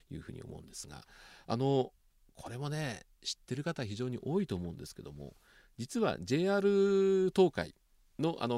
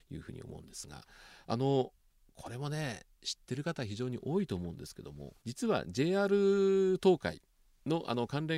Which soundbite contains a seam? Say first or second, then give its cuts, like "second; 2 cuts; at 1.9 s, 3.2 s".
second; 1 cut; at 5.4 s